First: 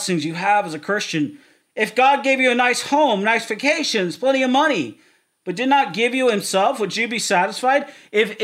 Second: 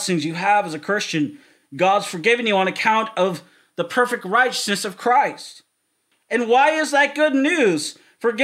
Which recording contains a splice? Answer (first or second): first